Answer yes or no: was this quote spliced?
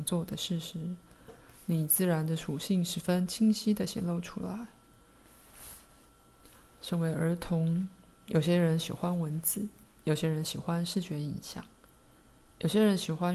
no